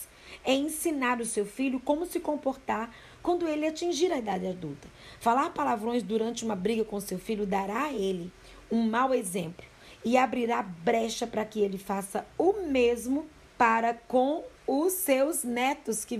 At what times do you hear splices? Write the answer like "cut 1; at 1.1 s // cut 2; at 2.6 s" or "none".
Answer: cut 1; at 13.5 s // cut 2; at 14.6 s